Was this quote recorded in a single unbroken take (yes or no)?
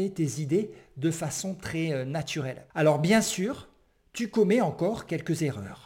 no